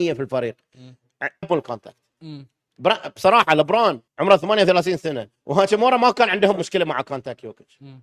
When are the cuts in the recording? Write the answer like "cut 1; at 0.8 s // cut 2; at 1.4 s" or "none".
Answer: cut 1; at 1.4 s // cut 2; at 4.1 s